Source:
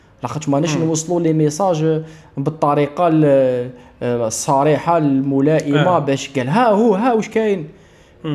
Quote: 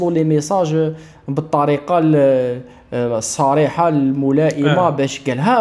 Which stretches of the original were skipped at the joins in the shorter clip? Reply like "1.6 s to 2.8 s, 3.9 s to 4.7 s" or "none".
none

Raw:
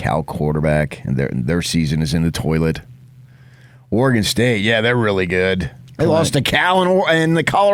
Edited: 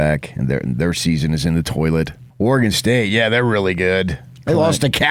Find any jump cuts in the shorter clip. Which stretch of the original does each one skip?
3.0 s to 3.8 s

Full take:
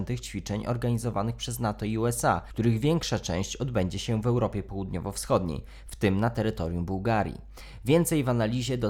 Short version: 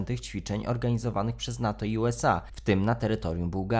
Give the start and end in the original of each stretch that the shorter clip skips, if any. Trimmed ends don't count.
2.5 s to 5.8 s

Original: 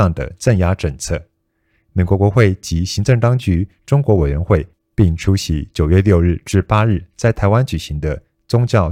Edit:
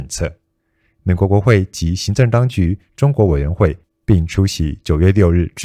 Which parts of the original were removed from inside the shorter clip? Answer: none

